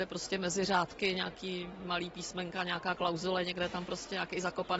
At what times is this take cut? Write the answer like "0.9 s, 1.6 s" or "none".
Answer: none